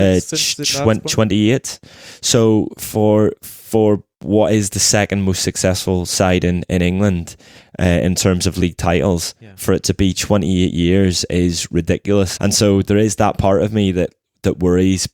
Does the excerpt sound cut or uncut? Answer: cut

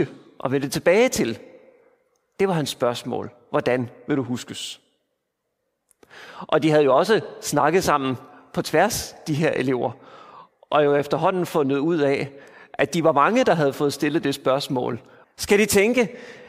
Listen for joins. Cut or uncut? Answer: cut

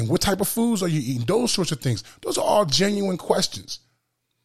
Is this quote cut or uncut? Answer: uncut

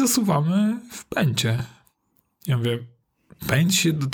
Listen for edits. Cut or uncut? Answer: uncut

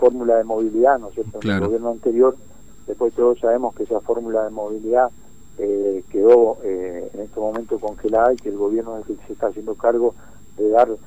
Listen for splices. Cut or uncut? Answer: uncut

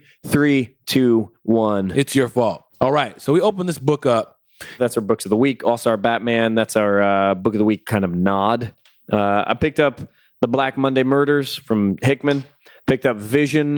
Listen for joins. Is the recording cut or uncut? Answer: cut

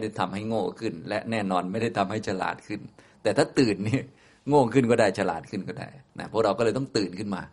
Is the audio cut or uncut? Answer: uncut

